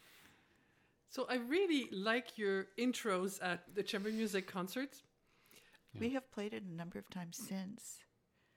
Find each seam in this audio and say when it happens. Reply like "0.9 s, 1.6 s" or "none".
3.7 s, 5.8 s